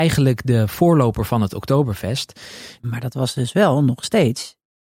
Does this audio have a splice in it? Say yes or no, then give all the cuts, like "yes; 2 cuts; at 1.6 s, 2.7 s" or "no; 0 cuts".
yes; 1 cut; at 2.8 s